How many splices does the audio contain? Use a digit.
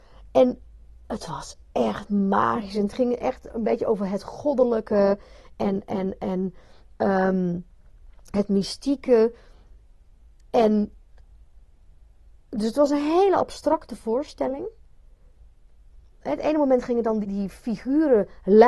2